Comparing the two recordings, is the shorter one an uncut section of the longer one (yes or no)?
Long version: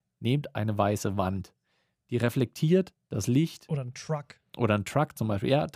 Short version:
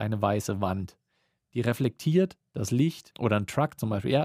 no